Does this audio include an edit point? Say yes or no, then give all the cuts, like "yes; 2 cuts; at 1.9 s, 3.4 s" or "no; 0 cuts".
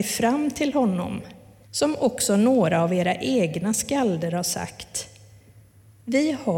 yes; 1 cut; at 1.6 s